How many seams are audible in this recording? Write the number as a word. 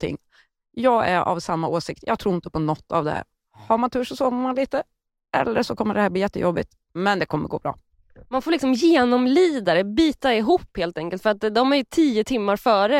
zero